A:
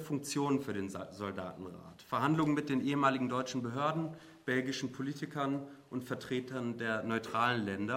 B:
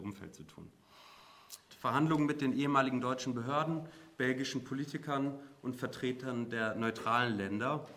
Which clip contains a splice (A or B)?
B